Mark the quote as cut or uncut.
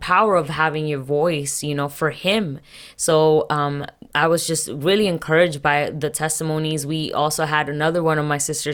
uncut